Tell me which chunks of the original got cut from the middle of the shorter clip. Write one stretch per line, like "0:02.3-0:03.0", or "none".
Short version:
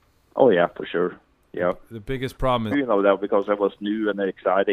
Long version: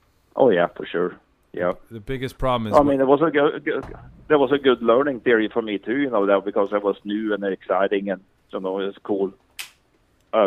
0:02.7-0:05.9